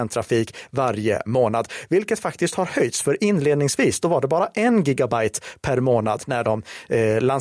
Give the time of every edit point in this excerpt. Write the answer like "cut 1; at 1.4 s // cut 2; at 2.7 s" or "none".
none

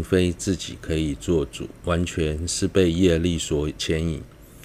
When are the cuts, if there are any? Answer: cut 1; at 1.8 s

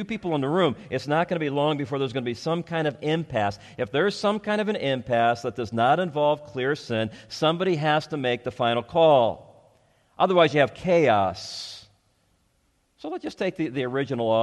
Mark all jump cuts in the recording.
none

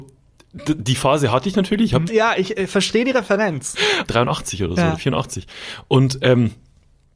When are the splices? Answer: cut 1; at 2.1 s // cut 2; at 4.0 s

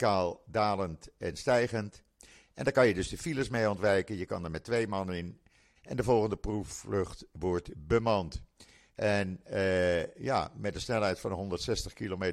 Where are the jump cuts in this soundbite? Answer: cut 1; at 5.8 s

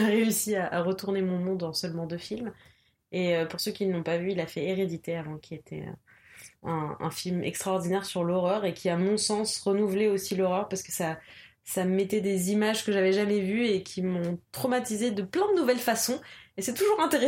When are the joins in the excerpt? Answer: none

